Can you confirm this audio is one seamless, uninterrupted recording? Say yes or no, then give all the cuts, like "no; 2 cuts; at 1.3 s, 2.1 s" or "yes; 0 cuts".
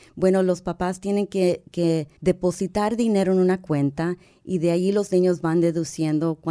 no; 1 cut; at 2.2 s